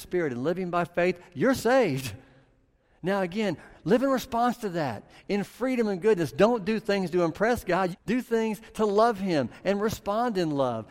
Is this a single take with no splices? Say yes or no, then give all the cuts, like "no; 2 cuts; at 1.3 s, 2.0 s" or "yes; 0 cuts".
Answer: no; 1 cut; at 7.9 s